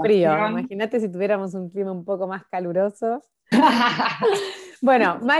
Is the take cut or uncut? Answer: cut